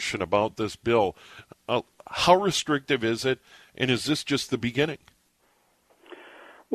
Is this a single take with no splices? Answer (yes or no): yes